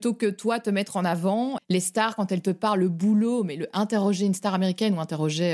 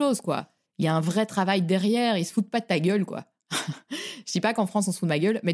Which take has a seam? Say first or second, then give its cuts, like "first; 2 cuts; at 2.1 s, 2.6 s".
first; 1 cut; at 1.6 s